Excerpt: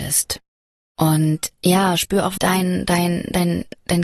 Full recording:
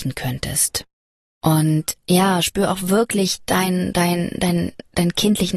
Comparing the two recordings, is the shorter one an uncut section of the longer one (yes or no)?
no